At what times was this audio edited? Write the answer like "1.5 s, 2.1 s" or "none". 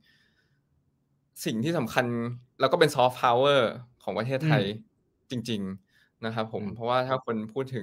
2.5 s